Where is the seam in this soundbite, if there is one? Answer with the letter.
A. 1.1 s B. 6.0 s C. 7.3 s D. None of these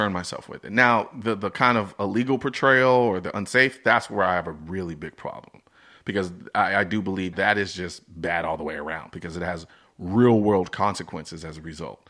C